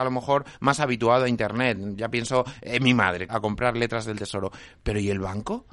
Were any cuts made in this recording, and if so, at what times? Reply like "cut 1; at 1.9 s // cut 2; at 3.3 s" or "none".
cut 1; at 3.3 s